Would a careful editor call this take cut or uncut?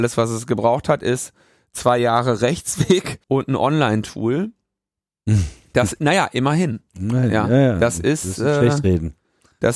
cut